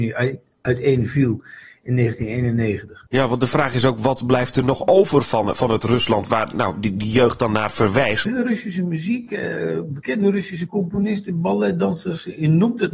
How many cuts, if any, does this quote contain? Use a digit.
2